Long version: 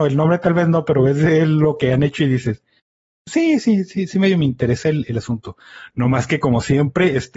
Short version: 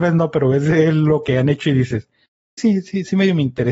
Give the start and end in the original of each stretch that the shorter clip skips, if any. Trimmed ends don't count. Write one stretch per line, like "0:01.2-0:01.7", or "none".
0:03.1-0:03.6

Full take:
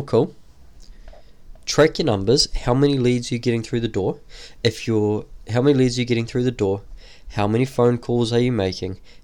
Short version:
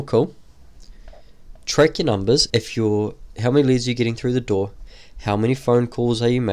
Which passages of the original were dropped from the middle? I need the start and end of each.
0:02.5-0:04.6

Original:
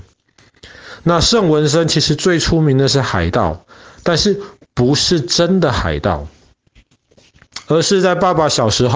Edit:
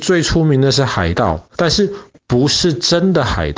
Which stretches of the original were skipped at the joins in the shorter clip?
0:03.7-0:04.0

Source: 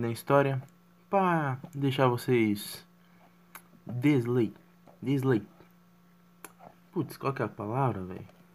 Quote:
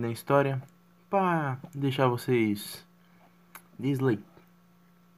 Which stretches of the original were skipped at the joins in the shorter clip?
0:03.8-0:05.0

